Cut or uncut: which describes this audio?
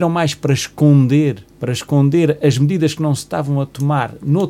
cut